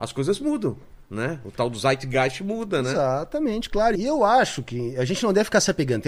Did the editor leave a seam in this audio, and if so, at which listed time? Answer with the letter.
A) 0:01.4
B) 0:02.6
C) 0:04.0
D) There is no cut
C